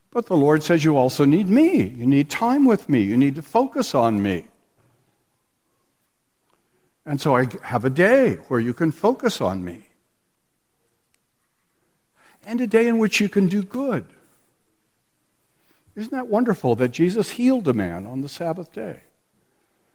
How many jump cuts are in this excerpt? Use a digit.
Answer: 0